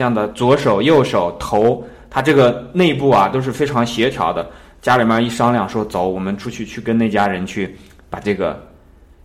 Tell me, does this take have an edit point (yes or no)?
no